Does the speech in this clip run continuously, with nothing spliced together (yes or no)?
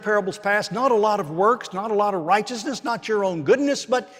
yes